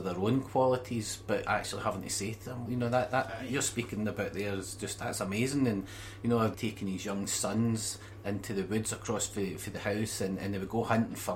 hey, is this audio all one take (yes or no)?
no